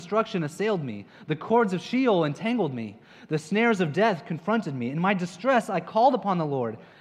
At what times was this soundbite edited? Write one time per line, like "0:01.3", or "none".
none